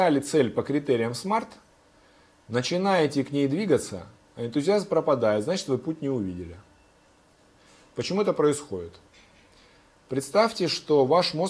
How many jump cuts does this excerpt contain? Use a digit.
0